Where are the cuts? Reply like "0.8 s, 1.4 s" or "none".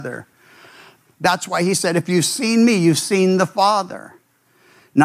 1.0 s